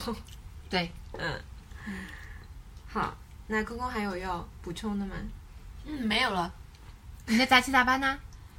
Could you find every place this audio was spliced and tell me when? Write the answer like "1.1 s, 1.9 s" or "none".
none